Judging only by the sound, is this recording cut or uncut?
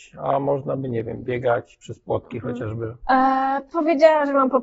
cut